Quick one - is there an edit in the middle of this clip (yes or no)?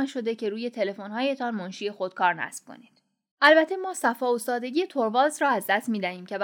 yes